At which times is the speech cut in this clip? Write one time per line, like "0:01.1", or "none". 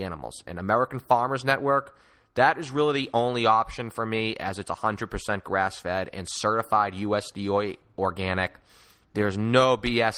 none